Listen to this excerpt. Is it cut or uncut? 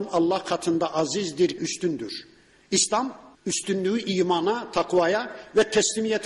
cut